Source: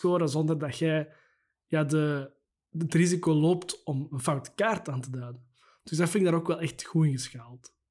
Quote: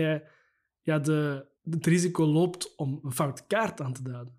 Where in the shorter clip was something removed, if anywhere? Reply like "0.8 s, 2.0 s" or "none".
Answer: 1.6 s